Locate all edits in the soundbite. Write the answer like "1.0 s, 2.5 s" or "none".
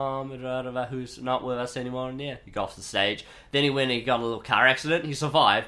none